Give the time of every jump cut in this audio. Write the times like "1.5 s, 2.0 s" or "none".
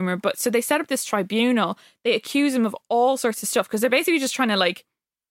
none